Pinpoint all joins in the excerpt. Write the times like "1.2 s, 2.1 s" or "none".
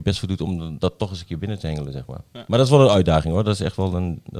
none